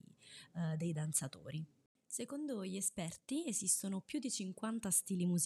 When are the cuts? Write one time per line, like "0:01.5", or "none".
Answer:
none